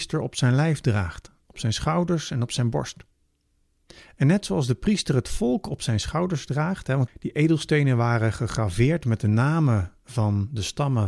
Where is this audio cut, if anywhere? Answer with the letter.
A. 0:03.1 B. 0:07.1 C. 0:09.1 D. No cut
B